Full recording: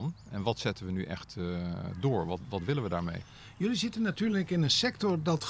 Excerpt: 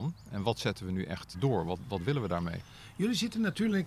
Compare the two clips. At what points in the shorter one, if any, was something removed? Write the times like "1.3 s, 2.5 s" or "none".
1.3 s